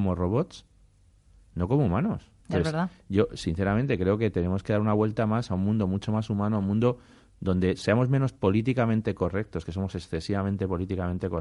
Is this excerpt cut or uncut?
cut